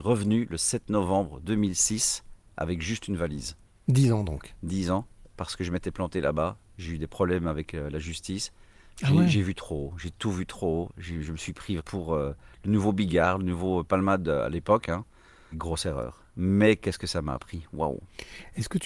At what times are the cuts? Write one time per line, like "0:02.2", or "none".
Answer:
0:11.8
0:15.5